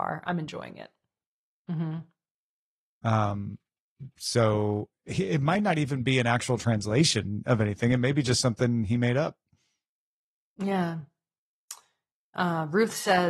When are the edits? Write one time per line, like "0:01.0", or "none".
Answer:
0:01.5